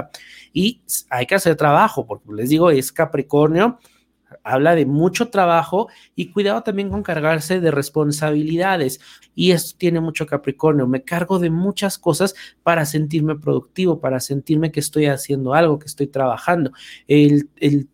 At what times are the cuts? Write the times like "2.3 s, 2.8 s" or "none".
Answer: 9.2 s